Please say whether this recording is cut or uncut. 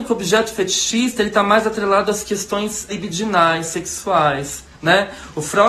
cut